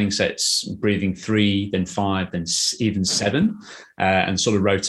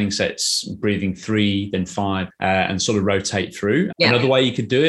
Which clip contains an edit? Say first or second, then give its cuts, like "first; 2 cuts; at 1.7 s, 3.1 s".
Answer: second; 2 cuts; at 2.3 s, 3.9 s